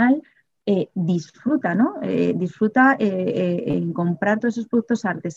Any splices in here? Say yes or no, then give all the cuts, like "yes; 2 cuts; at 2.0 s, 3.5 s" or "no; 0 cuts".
no; 0 cuts